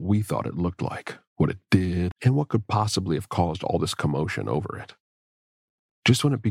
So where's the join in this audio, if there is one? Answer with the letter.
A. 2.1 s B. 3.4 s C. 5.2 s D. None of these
A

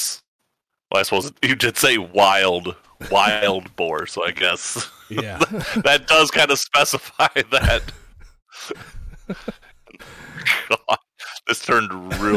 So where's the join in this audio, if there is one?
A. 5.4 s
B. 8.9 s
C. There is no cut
B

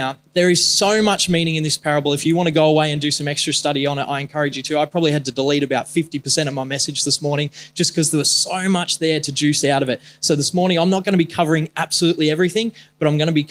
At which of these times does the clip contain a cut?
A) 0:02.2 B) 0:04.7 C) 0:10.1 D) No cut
D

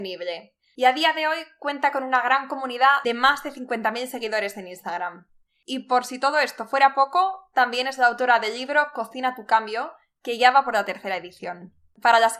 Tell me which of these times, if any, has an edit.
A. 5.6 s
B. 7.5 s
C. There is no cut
C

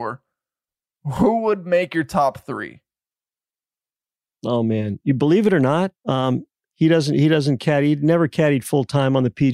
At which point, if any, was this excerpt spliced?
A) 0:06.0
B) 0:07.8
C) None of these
A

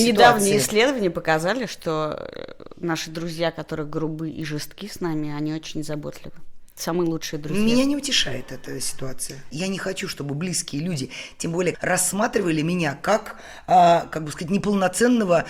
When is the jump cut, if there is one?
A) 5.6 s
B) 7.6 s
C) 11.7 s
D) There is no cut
C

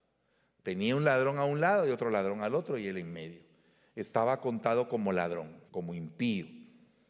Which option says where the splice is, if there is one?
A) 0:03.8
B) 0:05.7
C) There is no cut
B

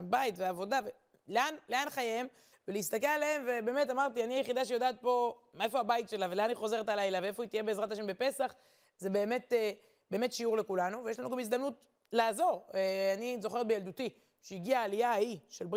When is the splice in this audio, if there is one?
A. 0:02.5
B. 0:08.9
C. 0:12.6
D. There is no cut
A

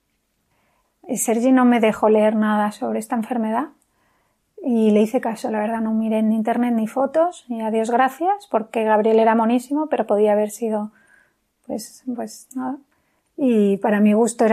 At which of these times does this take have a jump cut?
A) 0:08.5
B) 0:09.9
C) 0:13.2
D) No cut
C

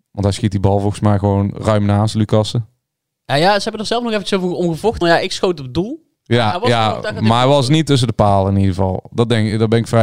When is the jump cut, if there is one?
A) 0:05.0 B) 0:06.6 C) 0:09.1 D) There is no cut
A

